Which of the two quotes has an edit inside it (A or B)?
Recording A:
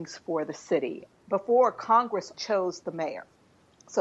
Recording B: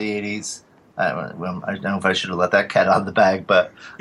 A